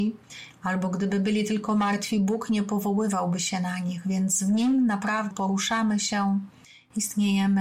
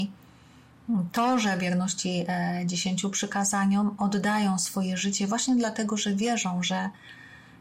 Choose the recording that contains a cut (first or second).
first